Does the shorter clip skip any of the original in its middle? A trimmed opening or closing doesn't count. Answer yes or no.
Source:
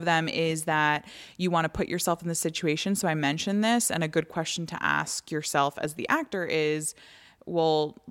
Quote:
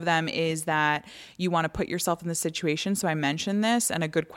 no